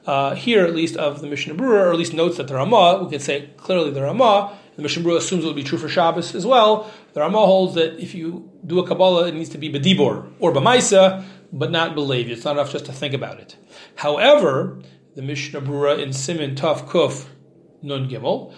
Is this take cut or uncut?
uncut